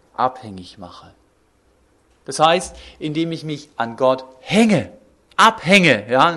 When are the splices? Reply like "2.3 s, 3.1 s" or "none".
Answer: none